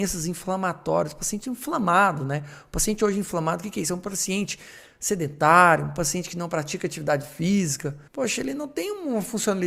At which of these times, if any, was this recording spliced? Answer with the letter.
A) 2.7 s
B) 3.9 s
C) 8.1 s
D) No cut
C